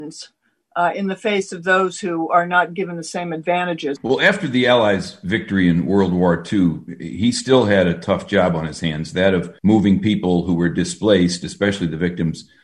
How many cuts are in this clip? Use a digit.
2